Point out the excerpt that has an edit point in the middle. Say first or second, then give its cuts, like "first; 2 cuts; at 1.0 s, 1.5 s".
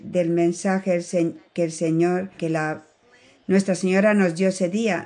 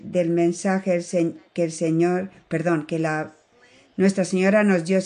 first; 1 cut; at 2.4 s